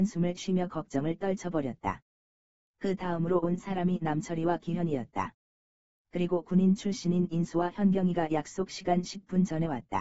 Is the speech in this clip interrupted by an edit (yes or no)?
yes